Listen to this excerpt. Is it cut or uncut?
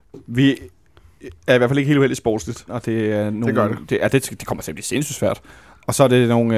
cut